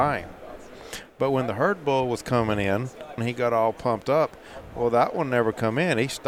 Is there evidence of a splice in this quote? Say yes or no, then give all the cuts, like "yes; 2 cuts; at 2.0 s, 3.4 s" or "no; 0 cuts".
yes; 1 cut; at 3.2 s